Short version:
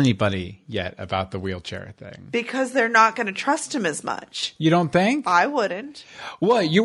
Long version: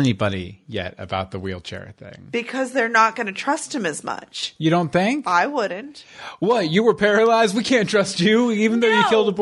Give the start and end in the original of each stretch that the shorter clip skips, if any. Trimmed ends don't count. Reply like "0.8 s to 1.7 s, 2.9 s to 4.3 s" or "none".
none